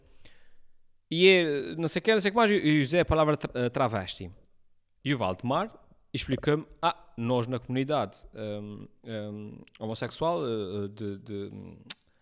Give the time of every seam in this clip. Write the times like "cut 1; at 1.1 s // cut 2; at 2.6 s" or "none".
cut 1; at 1.0 s

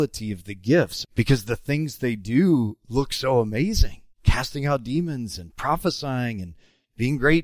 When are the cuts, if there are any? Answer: cut 1; at 1.0 s // cut 2; at 4.1 s

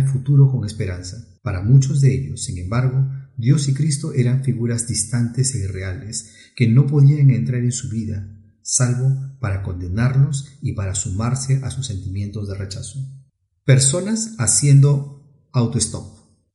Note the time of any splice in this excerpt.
none

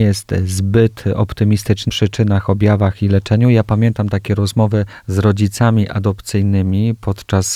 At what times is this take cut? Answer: cut 1; at 1.9 s

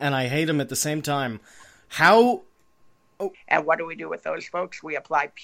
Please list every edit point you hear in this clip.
cut 1; at 3.3 s

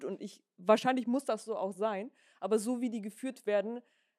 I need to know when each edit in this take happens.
none

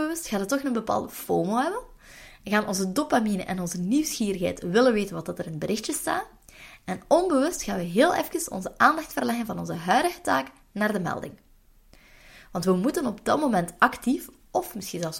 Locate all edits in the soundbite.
none

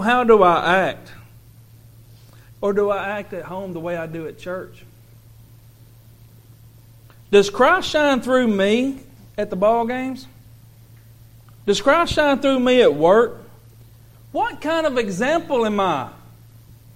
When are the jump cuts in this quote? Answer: cut 1; at 2.5 s

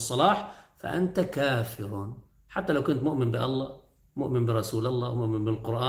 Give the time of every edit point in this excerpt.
none

